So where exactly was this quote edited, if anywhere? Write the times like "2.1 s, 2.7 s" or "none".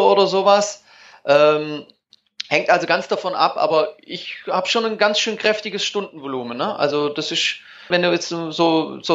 7.9 s